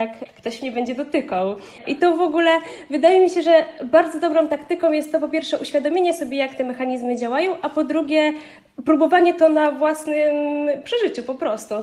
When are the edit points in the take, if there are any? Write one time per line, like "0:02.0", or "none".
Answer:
0:01.8